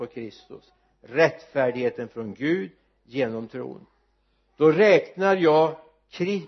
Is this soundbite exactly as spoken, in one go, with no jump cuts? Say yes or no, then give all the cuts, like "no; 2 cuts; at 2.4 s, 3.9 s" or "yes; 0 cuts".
yes; 0 cuts